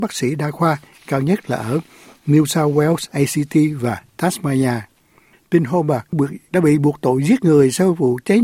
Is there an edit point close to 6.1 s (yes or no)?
yes